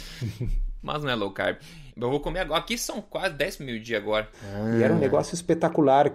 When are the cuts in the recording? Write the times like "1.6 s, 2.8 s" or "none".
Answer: 1.9 s, 4.3 s

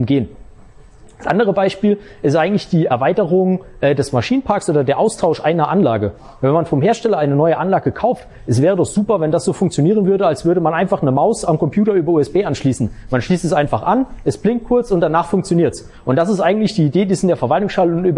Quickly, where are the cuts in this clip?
none

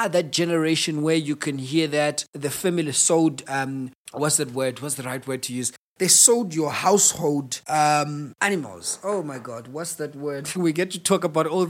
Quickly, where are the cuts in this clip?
10.5 s

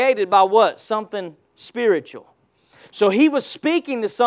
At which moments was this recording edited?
none

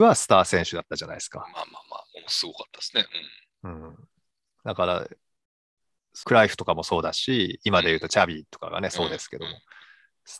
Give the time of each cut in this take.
6.2 s

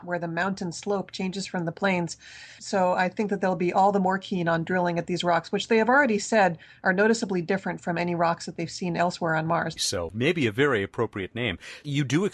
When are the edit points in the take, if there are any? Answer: 2.6 s, 9.8 s

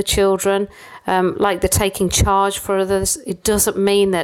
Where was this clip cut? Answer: none

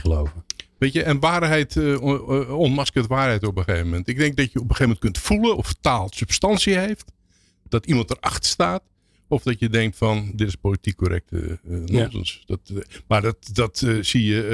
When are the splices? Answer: none

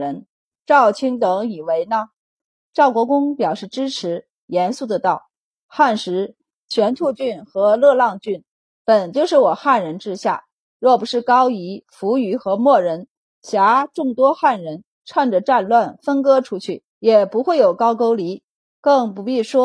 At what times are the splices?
16.9 s

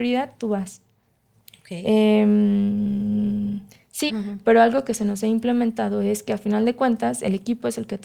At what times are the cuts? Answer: 4.1 s

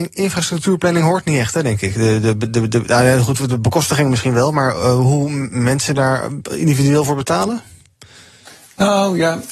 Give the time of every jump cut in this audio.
none

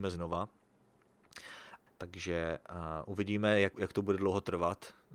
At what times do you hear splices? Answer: 1.9 s, 3.7 s

